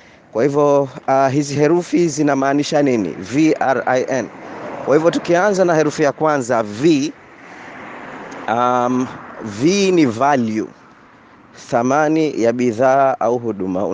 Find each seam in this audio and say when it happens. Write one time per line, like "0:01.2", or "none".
none